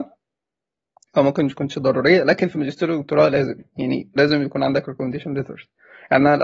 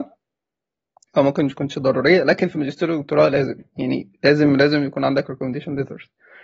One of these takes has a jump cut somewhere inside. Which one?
first; 1 cut; at 4.2 s

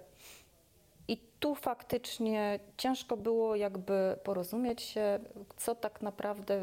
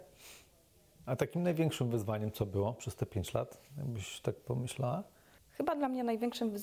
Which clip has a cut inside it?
second; 1 cut; at 1.0 s

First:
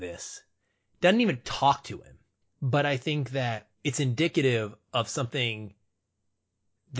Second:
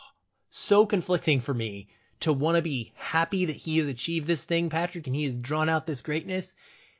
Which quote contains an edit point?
first; 2 cuts; at 2.4 s, 3.7 s

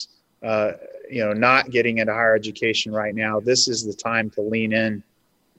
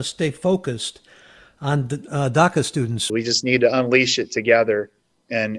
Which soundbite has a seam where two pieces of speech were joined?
second; 1 cut; at 3.1 s

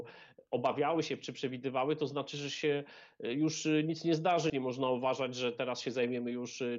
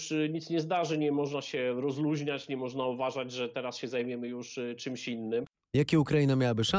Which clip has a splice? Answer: first; 1 cut; at 4.5 s

